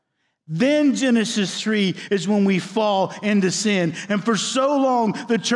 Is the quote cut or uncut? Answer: cut